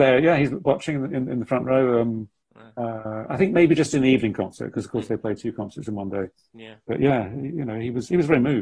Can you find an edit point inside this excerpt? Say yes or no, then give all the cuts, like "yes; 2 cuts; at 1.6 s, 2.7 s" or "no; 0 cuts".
no; 0 cuts